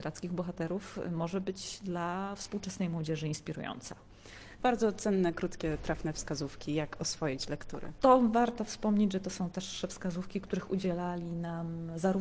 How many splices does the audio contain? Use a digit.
1